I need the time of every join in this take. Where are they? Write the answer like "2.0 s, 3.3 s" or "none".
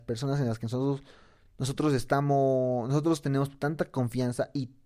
none